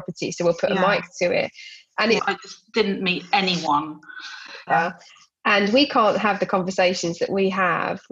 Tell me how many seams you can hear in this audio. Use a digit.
2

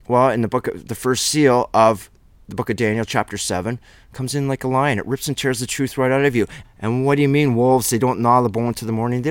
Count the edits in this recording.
1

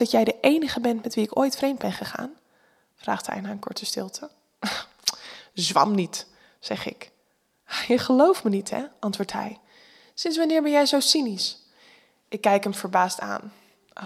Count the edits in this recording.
0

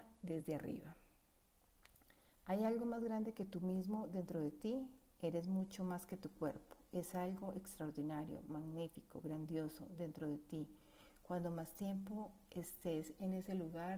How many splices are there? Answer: 0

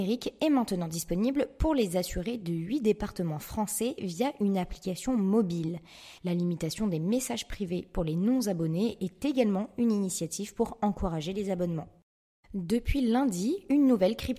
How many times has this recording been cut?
1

